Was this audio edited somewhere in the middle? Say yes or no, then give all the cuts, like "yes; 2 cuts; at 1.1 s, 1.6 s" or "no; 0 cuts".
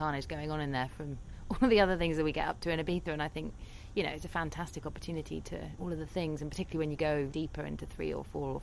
yes; 2 cuts; at 5.8 s, 7.3 s